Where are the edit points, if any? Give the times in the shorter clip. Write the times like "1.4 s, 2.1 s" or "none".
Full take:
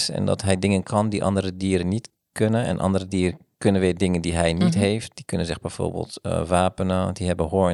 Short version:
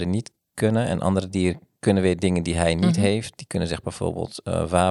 none